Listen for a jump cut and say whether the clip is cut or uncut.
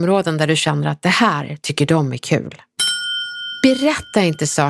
uncut